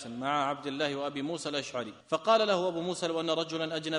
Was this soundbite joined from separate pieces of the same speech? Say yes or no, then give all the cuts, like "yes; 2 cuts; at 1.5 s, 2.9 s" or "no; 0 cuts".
yes; 1 cut; at 2.0 s